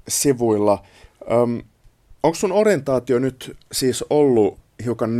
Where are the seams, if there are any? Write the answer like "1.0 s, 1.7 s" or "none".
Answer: 2.2 s